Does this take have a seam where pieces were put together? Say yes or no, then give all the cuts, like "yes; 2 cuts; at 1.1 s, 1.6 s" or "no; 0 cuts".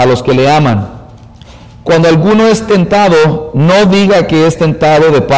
no; 0 cuts